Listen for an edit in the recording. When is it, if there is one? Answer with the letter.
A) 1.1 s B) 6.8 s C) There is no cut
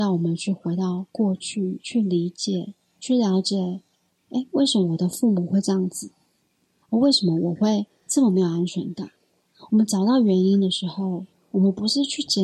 A